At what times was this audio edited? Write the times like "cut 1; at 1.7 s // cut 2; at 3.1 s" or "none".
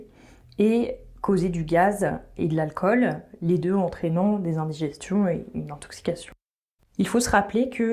cut 1; at 6.8 s